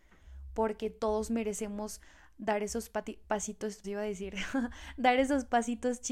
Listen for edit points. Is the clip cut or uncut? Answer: cut